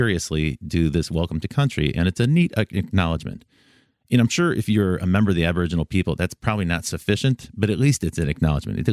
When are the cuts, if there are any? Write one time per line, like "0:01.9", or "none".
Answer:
none